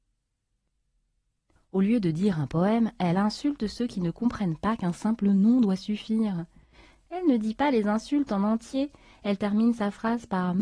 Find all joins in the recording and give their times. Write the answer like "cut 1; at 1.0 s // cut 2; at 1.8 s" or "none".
cut 1; at 1.6 s